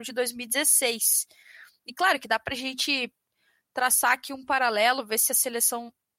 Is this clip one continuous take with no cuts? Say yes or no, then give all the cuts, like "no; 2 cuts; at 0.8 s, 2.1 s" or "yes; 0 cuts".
yes; 0 cuts